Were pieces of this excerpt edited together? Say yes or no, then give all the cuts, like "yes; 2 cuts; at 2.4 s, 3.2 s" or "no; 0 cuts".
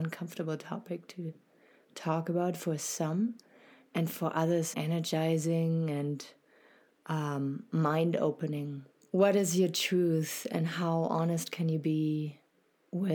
yes; 2 cuts; at 4.7 s, 9.0 s